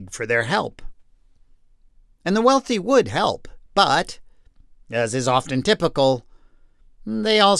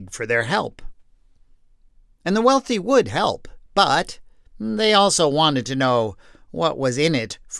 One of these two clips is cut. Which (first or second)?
second